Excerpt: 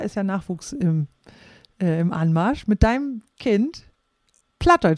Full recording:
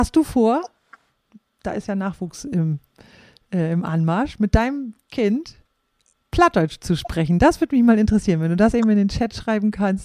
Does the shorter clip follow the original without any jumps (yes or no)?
yes